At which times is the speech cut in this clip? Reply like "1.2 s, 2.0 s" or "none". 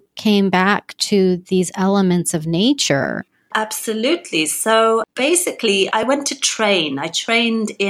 none